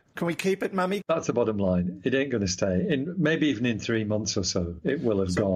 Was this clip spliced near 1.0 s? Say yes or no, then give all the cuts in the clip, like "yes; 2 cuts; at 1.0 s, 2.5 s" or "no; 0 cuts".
yes; 1 cut; at 1.0 s